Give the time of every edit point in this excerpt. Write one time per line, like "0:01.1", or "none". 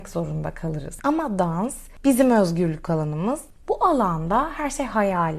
none